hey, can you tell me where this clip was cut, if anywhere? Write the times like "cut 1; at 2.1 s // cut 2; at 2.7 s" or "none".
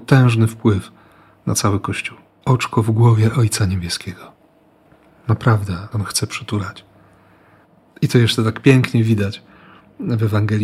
cut 1; at 2.4 s // cut 2; at 5.9 s